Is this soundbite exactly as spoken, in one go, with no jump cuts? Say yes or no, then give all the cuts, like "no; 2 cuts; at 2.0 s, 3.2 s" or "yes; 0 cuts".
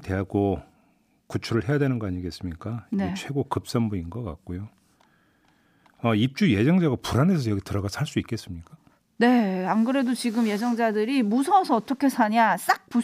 yes; 0 cuts